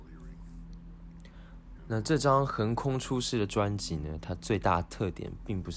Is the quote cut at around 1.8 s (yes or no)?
yes